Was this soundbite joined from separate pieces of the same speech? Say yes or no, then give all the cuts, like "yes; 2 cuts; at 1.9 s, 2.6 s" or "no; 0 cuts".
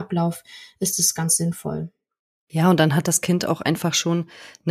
no; 0 cuts